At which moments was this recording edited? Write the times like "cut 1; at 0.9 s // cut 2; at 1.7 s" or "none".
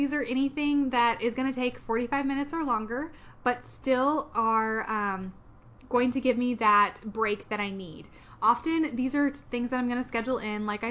none